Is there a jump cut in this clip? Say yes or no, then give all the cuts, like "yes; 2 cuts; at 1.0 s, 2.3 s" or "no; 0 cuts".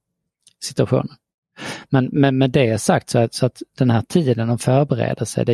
no; 0 cuts